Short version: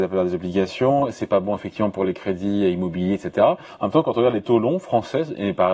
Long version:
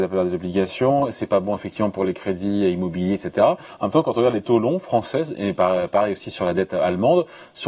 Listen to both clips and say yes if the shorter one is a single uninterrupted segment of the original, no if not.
yes